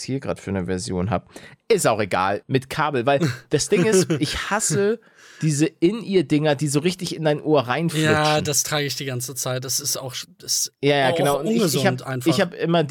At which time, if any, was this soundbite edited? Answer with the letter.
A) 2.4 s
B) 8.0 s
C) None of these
A